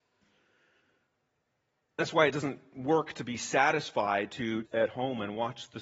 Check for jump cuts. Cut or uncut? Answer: cut